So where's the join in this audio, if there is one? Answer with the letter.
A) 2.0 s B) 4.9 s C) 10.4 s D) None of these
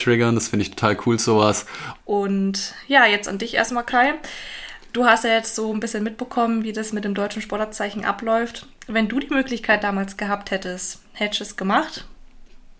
A